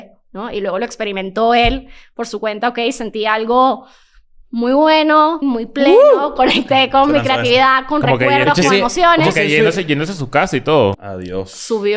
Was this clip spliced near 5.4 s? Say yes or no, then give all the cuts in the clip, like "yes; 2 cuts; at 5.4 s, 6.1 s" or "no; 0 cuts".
yes; 2 cuts; at 5.4 s, 10.9 s